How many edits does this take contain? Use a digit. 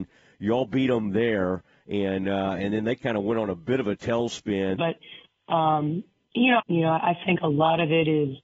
2